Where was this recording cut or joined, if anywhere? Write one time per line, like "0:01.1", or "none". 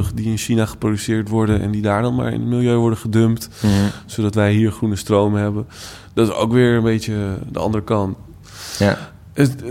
none